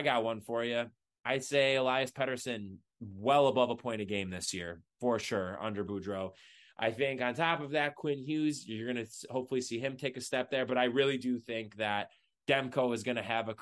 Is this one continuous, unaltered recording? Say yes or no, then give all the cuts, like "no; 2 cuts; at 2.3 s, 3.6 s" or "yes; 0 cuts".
yes; 0 cuts